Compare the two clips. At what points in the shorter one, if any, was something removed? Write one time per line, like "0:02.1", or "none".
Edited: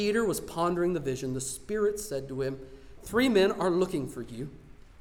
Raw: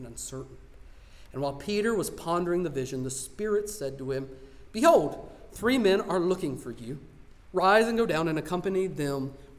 0:03.0